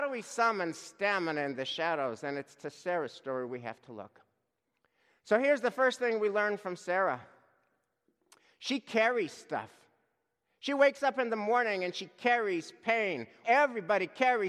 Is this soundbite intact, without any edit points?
no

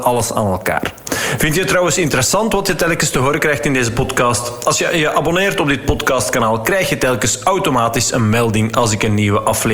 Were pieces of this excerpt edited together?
no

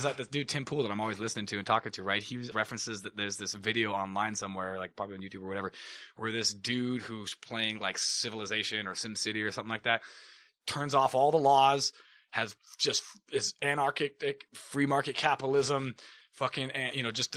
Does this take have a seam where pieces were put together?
yes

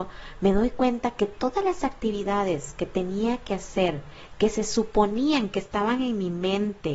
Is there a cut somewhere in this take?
no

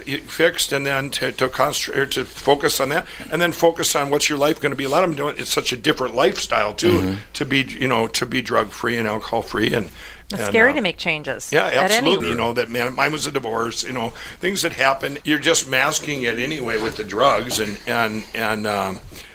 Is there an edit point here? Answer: yes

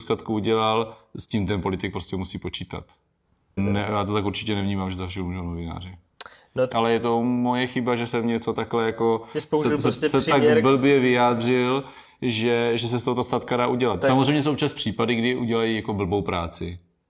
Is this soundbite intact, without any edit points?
no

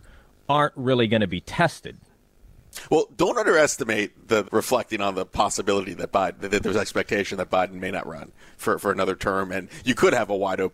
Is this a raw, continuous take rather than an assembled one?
no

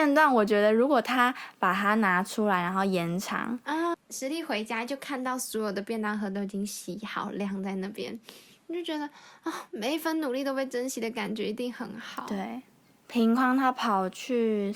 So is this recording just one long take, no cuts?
no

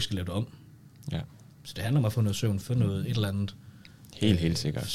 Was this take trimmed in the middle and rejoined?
yes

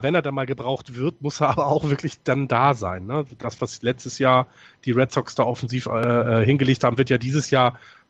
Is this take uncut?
yes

